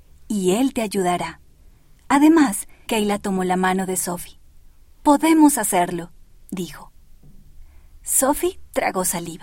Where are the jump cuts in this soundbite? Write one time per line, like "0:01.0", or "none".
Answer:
0:02.9